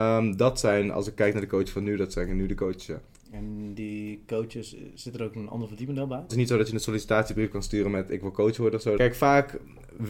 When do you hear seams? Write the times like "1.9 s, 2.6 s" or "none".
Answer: 6.3 s, 9.0 s